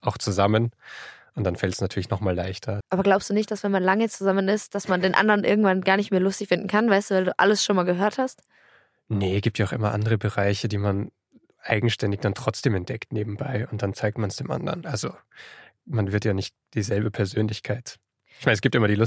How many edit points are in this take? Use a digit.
1